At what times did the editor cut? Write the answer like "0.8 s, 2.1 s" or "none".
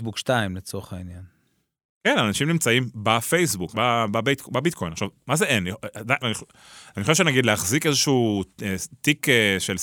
3.7 s, 6.2 s